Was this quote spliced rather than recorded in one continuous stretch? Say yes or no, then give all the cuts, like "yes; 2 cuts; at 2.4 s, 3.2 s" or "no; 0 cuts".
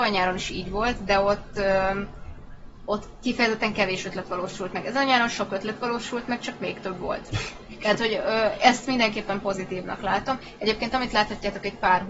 no; 0 cuts